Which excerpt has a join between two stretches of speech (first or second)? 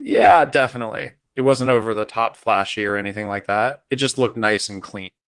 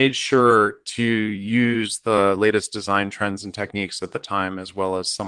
first